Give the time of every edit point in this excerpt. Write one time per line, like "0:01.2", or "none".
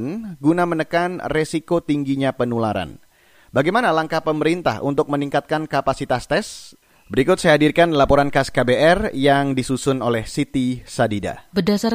none